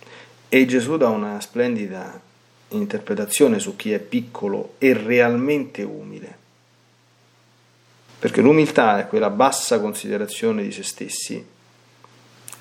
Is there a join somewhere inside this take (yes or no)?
yes